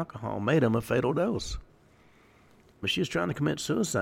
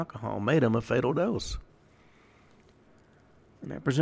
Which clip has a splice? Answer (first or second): first